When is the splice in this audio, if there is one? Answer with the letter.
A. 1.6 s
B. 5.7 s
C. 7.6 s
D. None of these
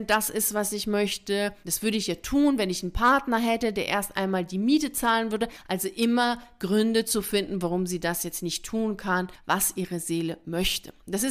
D